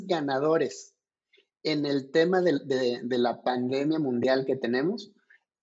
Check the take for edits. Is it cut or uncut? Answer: uncut